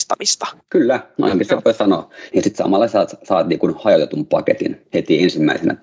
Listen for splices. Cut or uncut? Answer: cut